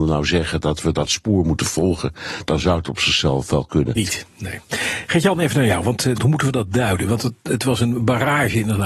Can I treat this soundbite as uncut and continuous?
no; 2 cuts; at 4.0 s, 6.2 s

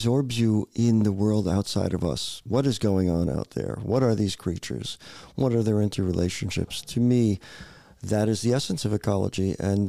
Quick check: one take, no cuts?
yes; 0 cuts

